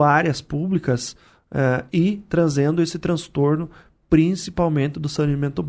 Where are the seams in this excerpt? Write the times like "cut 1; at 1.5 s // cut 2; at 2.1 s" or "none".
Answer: none